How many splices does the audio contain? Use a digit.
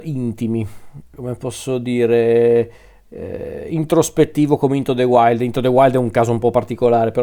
1